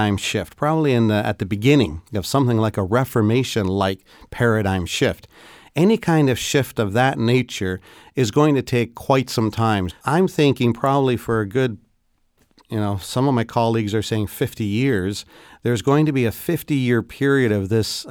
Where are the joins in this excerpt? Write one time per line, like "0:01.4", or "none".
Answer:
0:09.9